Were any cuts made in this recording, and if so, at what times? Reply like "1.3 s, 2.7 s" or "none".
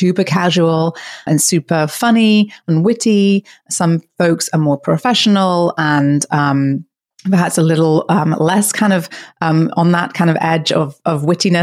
1.3 s